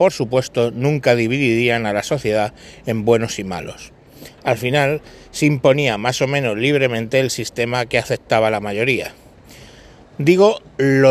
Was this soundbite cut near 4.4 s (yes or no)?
yes